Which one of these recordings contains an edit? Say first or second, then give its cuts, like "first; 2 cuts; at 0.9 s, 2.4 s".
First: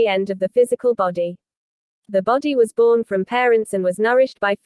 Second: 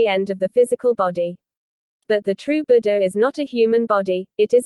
second; 1 cut; at 1.9 s